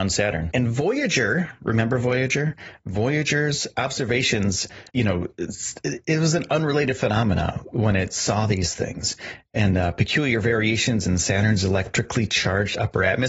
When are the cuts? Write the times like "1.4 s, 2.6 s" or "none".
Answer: 4.9 s